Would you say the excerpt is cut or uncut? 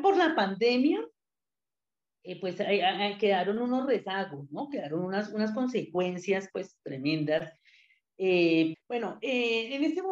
cut